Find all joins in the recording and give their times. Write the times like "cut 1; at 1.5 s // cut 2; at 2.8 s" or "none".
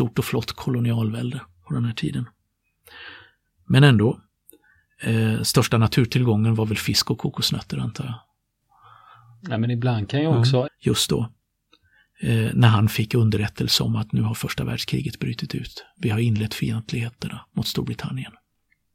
cut 1; at 10.7 s